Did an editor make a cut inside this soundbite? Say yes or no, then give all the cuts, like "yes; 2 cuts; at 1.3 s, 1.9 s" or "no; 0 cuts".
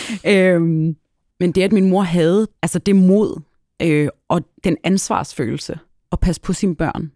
no; 0 cuts